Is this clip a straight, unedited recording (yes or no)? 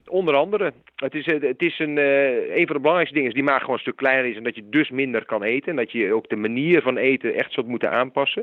yes